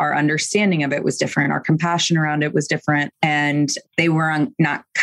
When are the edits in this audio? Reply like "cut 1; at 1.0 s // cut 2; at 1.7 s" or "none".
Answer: none